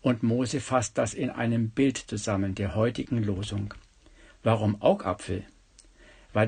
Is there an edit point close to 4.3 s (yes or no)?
yes